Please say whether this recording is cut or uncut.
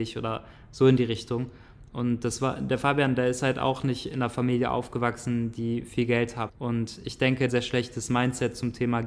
cut